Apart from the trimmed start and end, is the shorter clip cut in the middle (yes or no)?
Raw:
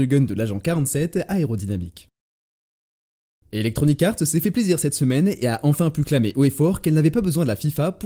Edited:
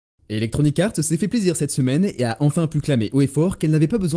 no